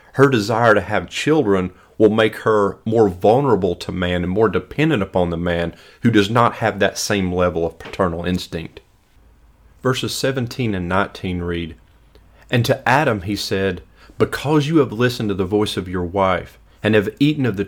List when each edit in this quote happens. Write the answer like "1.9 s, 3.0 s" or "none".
10.7 s

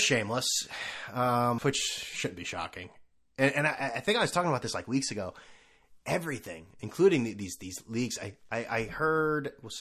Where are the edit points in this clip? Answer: 1.6 s

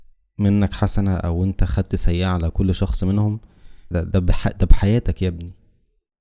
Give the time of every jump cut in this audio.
3.9 s

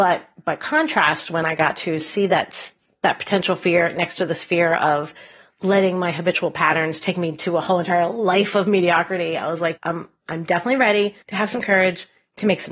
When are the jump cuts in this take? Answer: 9.8 s, 11.2 s

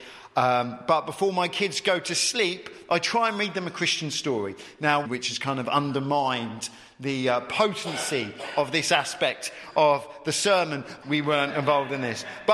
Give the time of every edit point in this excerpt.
5.0 s, 11.0 s

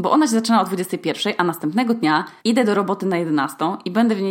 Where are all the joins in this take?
2.4 s

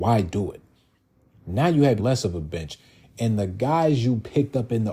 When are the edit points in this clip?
2.0 s

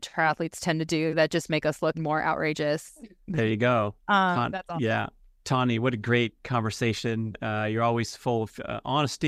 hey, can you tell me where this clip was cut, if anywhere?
1.9 s, 4.0 s

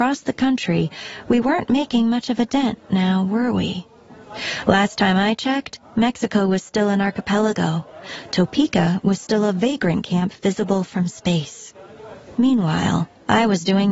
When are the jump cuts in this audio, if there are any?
12.3 s

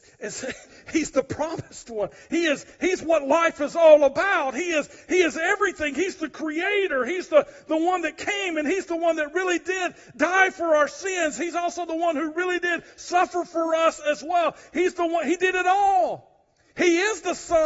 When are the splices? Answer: none

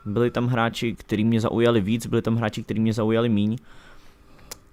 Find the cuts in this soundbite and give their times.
0.9 s

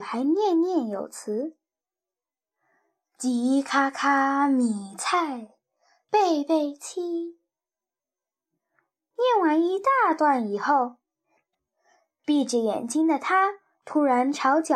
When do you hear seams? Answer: none

